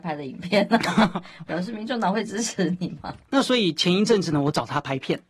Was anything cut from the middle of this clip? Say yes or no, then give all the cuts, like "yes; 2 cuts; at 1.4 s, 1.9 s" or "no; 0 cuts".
yes; 1 cut; at 3.3 s